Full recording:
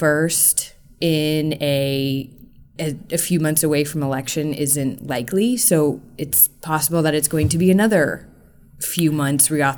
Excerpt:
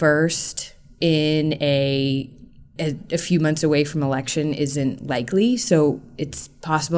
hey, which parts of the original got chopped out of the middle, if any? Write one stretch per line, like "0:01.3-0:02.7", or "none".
none